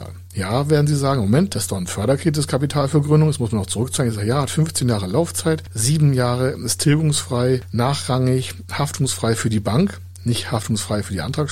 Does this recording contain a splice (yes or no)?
no